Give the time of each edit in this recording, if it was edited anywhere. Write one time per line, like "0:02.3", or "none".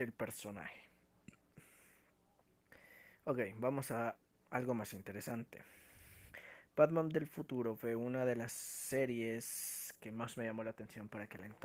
none